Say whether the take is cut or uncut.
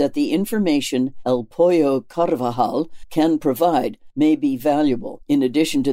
cut